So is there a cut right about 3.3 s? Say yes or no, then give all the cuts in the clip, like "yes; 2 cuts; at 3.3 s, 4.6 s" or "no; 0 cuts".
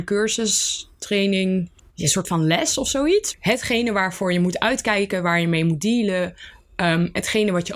yes; 2 cuts; at 1.8 s, 3.3 s